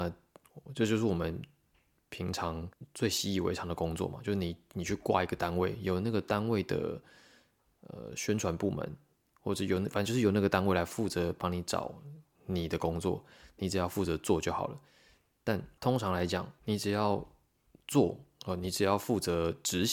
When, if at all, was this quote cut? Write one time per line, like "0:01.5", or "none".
none

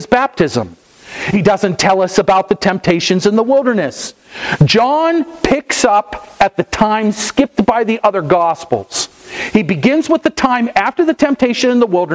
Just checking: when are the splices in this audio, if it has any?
none

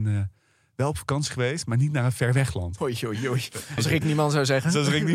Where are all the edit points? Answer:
0:02.8
0:03.8

